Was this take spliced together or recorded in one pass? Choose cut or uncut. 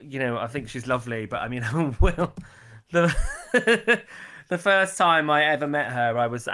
uncut